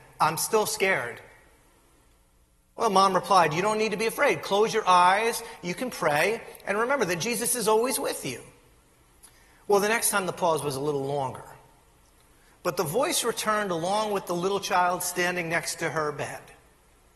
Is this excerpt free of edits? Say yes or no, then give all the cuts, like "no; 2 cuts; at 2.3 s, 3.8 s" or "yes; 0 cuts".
yes; 0 cuts